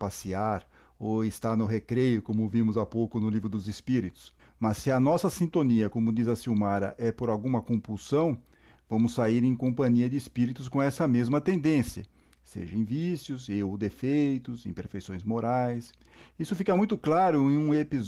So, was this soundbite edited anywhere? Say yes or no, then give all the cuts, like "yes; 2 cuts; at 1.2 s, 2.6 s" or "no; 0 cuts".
yes; 1 cut; at 4.4 s